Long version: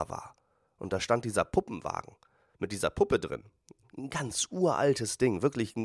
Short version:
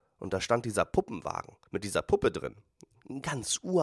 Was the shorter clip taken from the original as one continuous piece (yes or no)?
no